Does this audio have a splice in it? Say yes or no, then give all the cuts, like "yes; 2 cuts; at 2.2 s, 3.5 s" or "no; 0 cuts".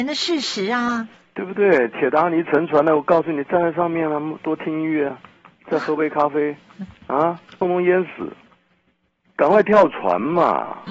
yes; 1 cut; at 7.6 s